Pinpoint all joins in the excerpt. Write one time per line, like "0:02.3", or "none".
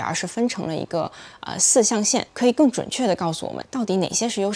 none